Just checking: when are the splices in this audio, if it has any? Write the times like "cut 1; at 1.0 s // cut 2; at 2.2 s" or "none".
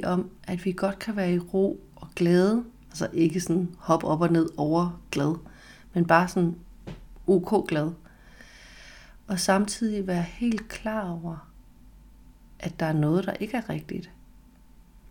none